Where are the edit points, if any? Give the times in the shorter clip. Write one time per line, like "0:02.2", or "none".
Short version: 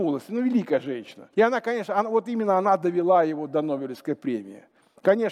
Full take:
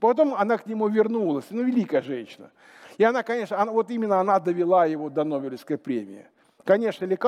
0:01.3